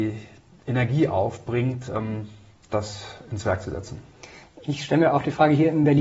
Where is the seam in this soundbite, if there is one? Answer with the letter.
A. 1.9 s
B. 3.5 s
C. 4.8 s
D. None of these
D